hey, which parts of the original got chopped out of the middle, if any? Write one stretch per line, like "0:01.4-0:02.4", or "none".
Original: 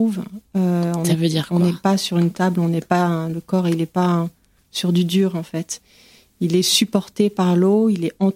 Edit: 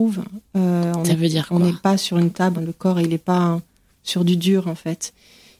0:02.5-0:03.2